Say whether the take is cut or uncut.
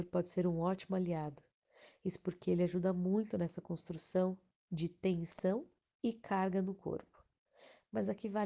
uncut